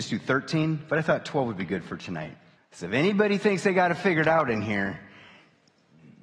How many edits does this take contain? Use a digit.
1